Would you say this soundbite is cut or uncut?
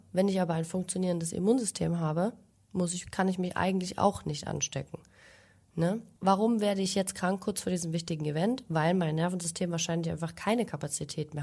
uncut